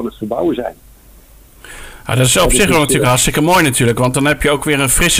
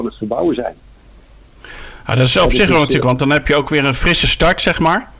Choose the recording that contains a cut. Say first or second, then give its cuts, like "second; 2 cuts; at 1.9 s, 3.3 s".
second; 1 cut; at 3.0 s